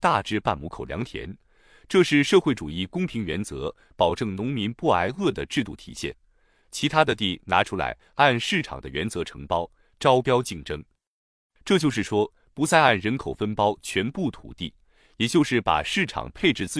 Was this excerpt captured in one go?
yes; 0 cuts

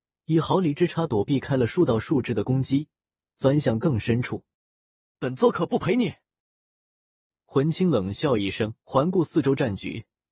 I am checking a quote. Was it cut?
yes; 2 cuts; at 5.1 s, 8.8 s

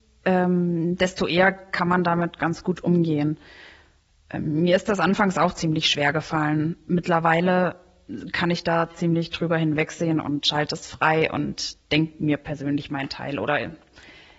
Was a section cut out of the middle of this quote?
no; 0 cuts

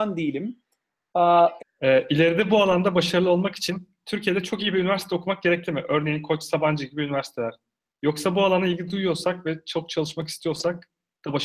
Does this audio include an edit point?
yes; 1 cut; at 1.6 s

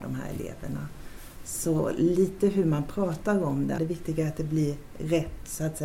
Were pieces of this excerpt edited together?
yes; 1 cut; at 3.8 s

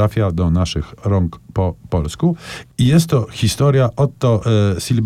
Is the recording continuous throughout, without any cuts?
yes; 0 cuts

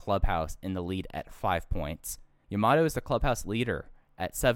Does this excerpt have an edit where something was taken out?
yes; 1 cut; at 2.4 s

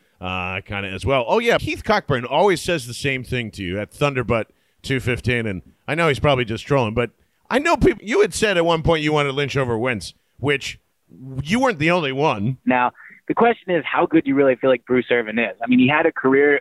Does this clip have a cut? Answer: yes; 3 cuts; at 1.6 s, 8.0 s, 12.6 s

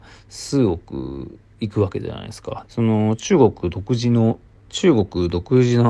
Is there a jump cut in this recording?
yes; 1 cut; at 2.7 s

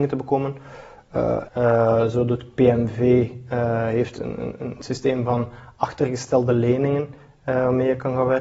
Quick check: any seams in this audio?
yes; 1 cut; at 1.4 s

